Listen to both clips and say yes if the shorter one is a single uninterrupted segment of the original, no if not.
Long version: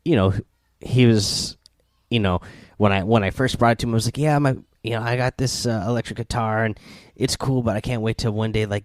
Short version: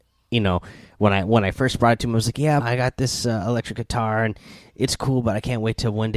no